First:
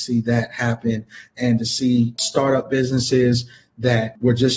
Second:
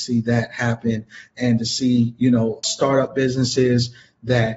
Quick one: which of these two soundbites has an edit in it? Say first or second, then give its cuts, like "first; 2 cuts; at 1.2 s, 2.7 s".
first; 1 cut; at 2.2 s